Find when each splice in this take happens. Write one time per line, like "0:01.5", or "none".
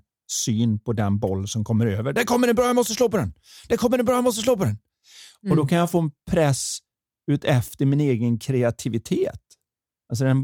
none